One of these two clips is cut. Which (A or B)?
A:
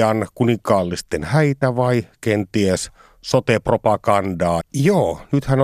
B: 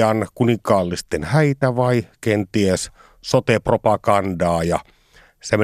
A